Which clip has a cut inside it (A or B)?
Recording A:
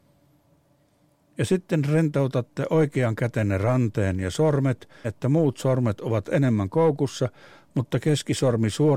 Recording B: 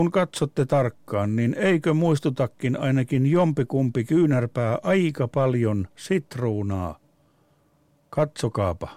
A